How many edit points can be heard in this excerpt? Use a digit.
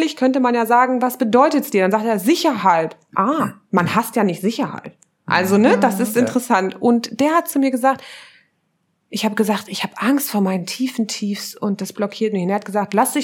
0